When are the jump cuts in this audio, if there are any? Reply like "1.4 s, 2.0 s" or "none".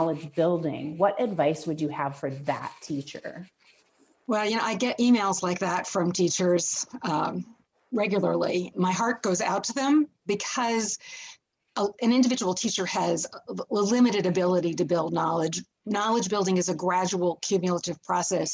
8.7 s